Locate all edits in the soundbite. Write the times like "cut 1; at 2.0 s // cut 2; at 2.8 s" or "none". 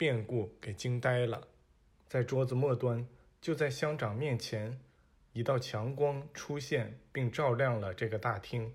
cut 1; at 1.9 s